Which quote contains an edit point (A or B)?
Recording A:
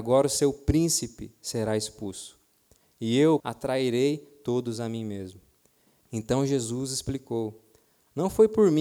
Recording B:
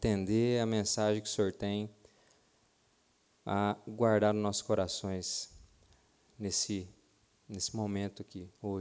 A